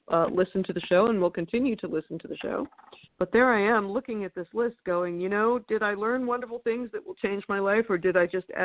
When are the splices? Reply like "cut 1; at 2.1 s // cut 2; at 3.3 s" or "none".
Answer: cut 1; at 3.0 s

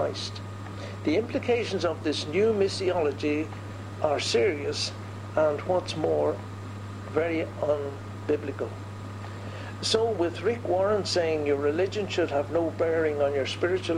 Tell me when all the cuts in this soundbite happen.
none

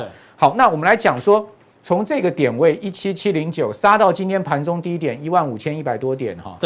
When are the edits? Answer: cut 1; at 1.8 s

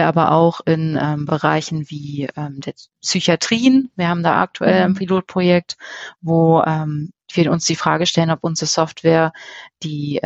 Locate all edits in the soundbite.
none

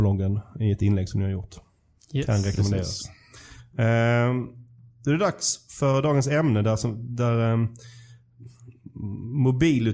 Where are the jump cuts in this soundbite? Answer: none

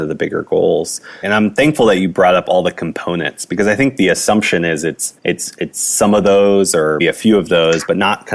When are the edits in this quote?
cut 1; at 1.2 s // cut 2; at 5.2 s // cut 3; at 7.0 s

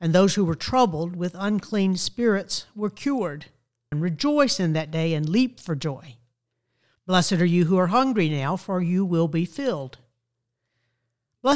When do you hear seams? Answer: cut 1; at 3.9 s // cut 2; at 7.0 s

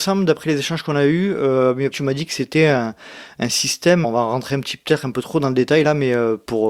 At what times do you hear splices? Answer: cut 1; at 1.9 s // cut 2; at 4.0 s

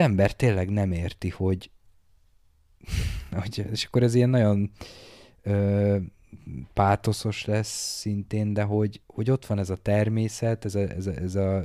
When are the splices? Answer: none

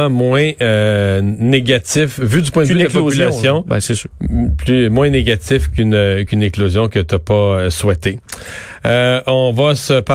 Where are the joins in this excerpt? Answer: none

